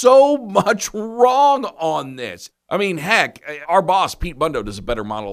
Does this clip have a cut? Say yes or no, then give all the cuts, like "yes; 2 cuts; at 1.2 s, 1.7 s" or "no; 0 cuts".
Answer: yes; 2 cuts; at 2.5 s, 3.6 s